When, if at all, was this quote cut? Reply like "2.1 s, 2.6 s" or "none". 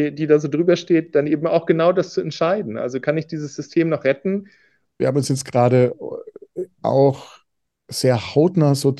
4.9 s, 6.8 s